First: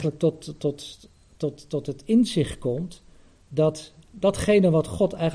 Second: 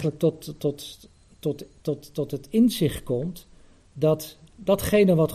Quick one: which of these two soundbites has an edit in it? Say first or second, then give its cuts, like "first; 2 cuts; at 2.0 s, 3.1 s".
first; 1 cut; at 1.3 s